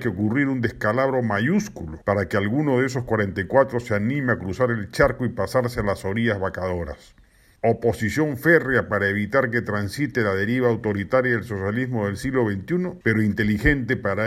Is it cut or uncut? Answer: cut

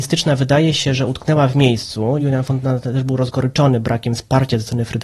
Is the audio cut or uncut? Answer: uncut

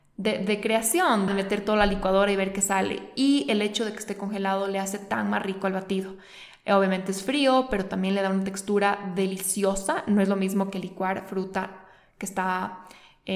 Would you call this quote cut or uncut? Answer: cut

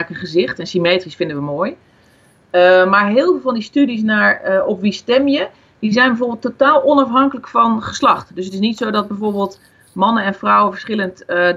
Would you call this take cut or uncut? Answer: uncut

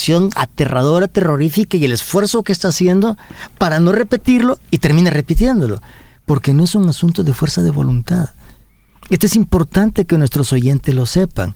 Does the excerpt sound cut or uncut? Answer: uncut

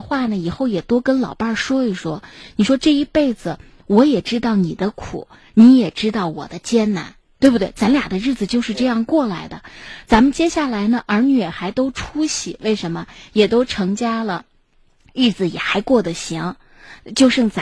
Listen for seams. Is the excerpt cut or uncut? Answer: uncut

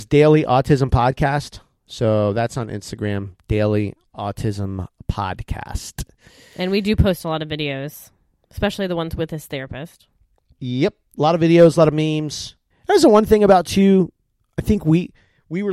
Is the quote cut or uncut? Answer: cut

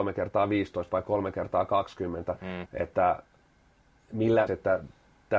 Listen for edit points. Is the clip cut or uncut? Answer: cut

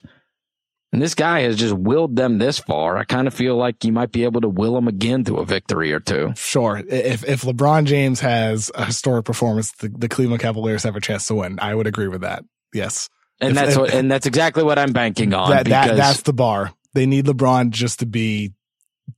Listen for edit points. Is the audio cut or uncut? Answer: uncut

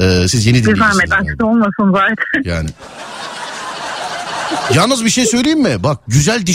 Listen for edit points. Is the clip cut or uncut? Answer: cut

